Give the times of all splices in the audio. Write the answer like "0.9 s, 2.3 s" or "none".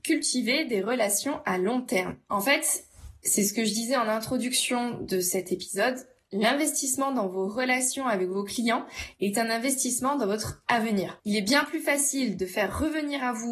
none